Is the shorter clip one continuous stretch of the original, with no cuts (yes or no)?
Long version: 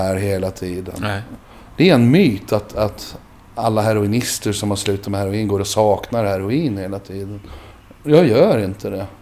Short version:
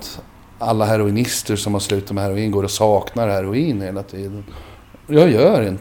yes